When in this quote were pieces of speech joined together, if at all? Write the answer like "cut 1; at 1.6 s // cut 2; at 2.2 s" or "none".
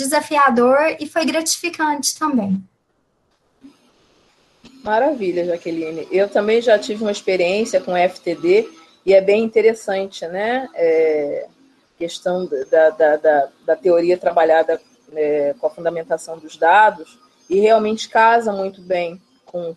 none